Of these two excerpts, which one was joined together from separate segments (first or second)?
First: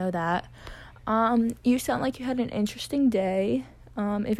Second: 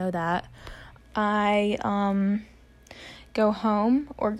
second